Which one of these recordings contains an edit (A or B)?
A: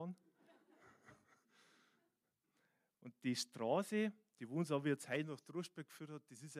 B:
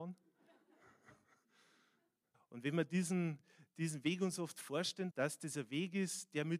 B